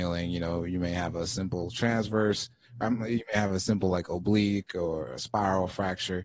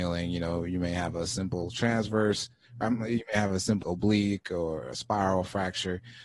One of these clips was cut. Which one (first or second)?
second